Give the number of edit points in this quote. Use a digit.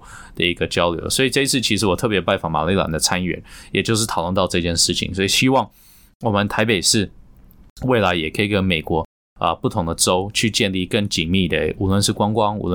0